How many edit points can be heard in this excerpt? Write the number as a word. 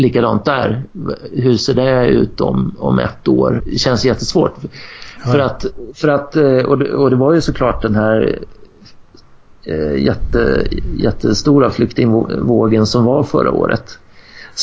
one